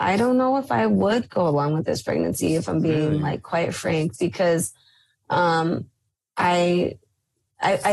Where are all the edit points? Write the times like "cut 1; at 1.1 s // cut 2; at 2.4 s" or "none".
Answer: none